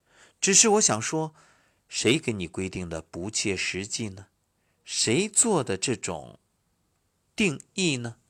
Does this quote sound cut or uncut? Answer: uncut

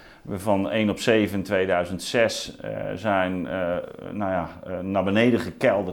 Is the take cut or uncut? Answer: uncut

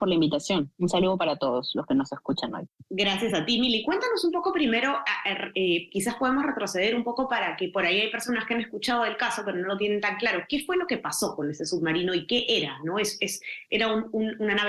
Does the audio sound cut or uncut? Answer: uncut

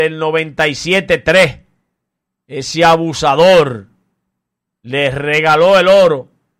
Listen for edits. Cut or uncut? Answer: uncut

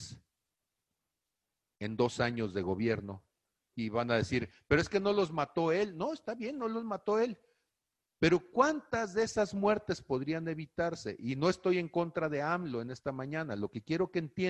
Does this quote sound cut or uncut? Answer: uncut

